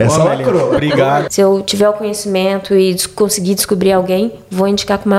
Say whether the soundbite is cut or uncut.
cut